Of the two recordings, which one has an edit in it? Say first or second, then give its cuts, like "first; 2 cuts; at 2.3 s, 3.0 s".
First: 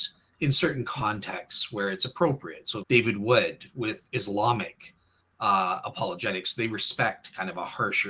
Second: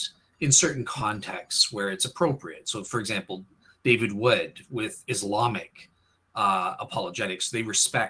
first; 1 cut; at 2.8 s